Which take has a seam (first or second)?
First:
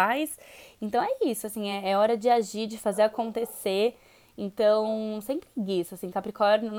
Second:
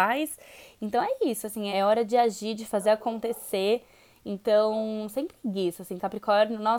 second